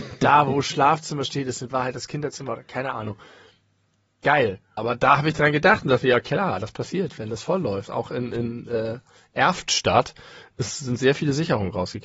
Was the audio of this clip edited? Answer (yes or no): yes